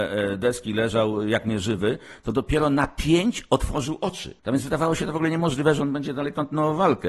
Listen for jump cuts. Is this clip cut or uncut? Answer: cut